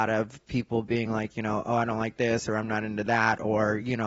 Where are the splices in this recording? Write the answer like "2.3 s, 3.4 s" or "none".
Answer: none